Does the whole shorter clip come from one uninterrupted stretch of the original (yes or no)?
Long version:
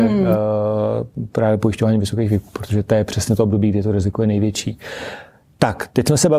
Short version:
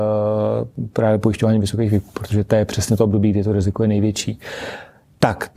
yes